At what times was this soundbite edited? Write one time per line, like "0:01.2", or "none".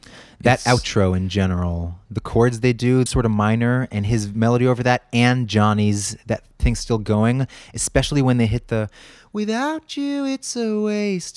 0:03.1